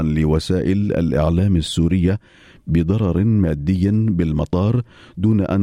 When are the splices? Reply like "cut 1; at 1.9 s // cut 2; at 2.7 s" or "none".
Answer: none